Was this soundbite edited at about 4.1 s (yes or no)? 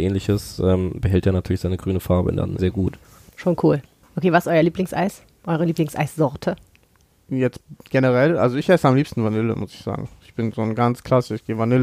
no